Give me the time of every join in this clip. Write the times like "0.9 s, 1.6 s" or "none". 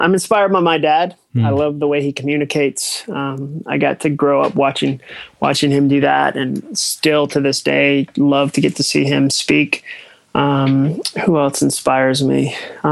none